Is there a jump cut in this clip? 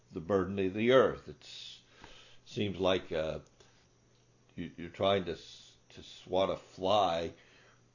no; 0 cuts

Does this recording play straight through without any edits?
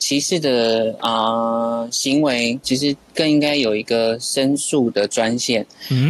no; 1 cut; at 2.6 s

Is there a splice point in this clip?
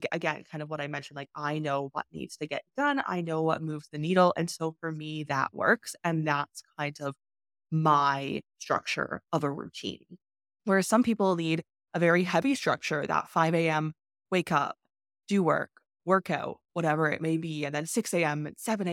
no; 0 cuts

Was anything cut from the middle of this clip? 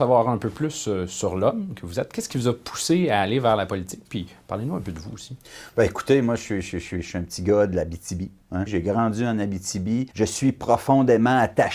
yes; 2 cuts; at 8.7 s, 10.1 s

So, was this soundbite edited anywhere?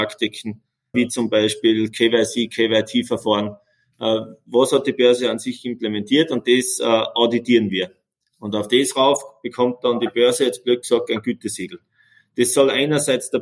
yes; 1 cut; at 0.9 s

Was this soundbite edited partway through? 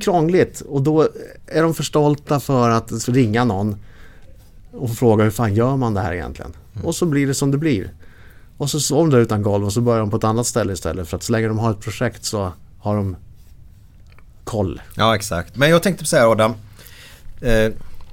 yes; 1 cut; at 15.5 s

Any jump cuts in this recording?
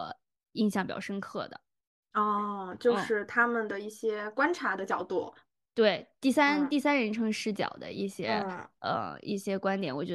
no; 0 cuts

